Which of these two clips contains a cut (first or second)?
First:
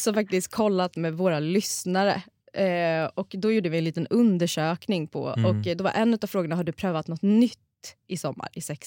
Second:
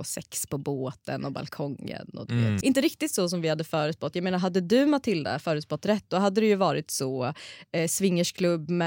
second